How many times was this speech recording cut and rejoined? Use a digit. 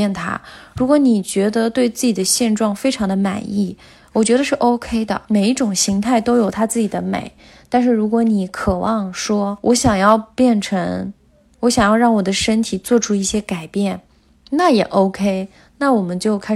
0